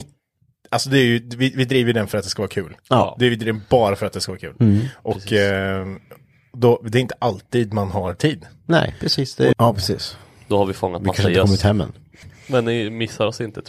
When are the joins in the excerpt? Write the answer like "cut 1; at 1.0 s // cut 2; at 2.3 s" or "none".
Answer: cut 1; at 9.5 s // cut 2; at 12.2 s